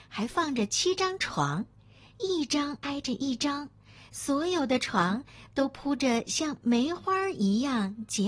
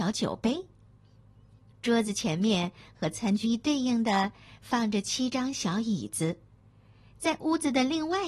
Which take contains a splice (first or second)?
second